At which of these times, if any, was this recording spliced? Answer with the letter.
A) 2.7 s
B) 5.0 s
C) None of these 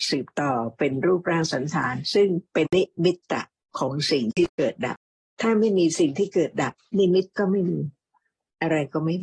A